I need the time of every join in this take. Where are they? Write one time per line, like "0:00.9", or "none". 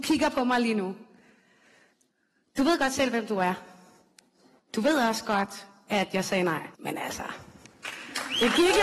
0:06.7